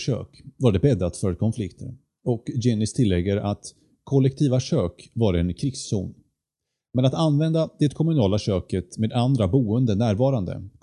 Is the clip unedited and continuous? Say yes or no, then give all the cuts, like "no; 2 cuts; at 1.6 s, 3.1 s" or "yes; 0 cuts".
yes; 0 cuts